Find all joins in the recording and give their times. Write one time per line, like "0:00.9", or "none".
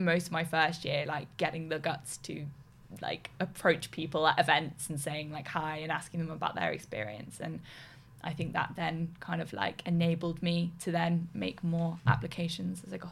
none

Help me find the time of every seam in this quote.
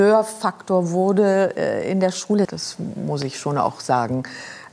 0:02.5

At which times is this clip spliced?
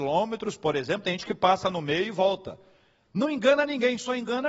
none

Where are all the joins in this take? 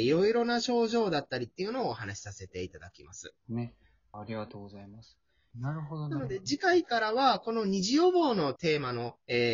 0:04.1
0:05.5

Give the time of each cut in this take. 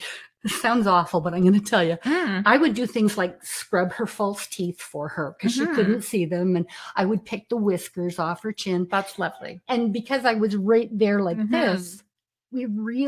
none

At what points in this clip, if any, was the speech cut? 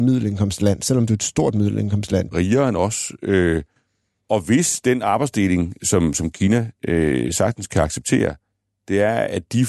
0:02.3

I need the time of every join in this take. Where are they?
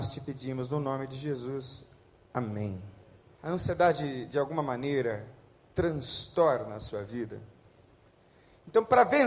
0:03.4

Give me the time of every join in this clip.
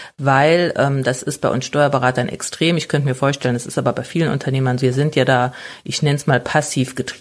0:04.8

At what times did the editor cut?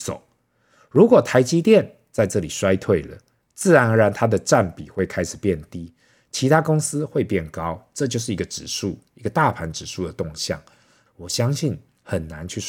0:11.1

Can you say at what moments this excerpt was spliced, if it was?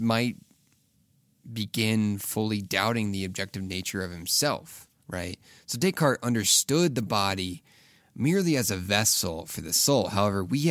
none

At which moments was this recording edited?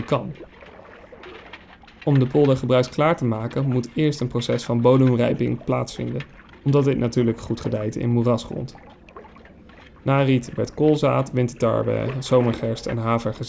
0:06.5

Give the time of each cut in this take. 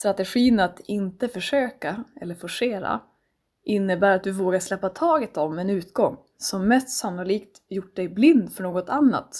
none

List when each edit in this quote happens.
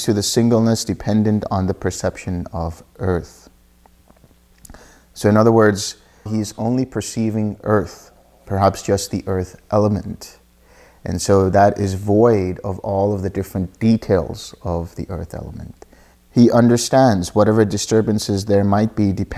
0:06.3
0:16.1

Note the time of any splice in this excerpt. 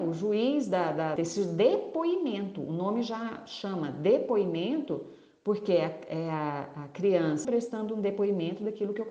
0:01.2
0:07.4

